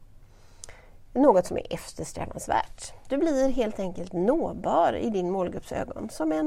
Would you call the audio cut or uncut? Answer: uncut